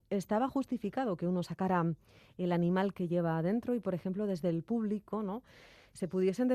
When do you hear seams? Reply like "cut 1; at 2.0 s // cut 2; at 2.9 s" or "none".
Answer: none